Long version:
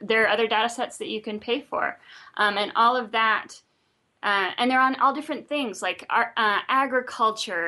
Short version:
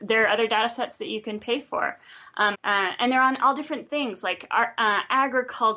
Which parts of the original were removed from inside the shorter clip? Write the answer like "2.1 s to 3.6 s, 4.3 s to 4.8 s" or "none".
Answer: 2.5 s to 4.1 s